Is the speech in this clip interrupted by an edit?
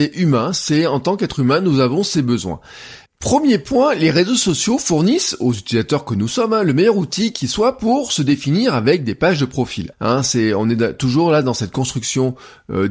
yes; 2 cuts; at 3.1 s, 9.9 s

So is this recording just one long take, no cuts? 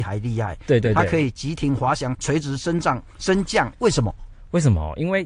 no; 2 cuts; at 2.1 s, 3.7 s

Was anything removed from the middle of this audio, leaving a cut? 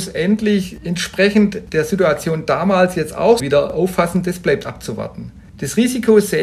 yes; 1 cut; at 3.4 s

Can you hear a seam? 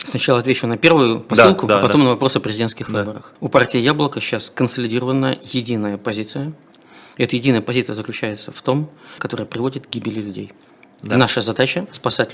yes; 3 cuts; at 1.7 s, 3.4 s, 9.2 s

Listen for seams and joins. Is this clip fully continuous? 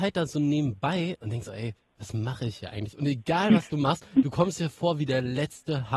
yes; 0 cuts

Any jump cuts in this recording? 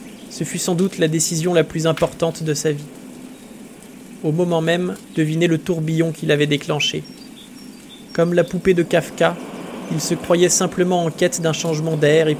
yes; 1 cut; at 5.1 s

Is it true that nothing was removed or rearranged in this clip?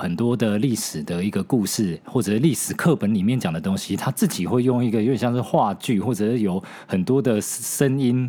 yes; 0 cuts

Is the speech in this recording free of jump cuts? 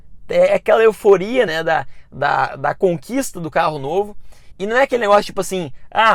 yes; 0 cuts

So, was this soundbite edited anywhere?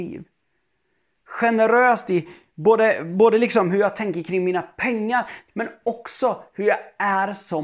yes; 1 cut; at 5.5 s

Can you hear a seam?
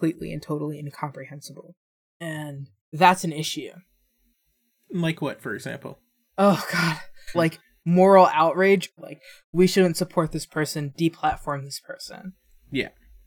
yes; 2 cuts; at 7.3 s, 9.0 s

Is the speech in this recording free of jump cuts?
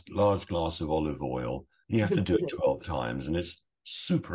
no; 1 cut; at 1.8 s

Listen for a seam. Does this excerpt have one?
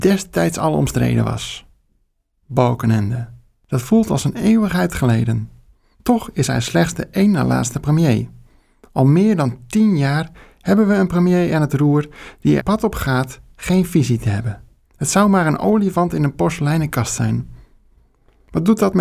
yes; 1 cut; at 12.6 s

